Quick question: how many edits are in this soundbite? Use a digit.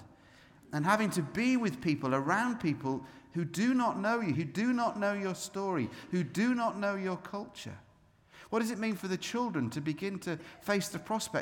1